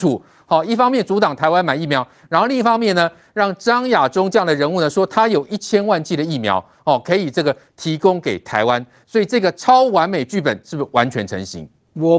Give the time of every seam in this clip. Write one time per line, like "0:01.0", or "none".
none